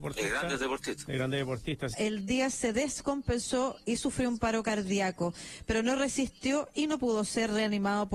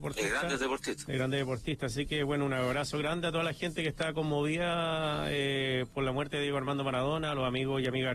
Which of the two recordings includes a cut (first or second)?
first